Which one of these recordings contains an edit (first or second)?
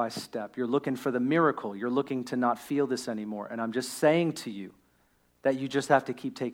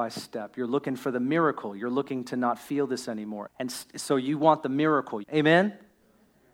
second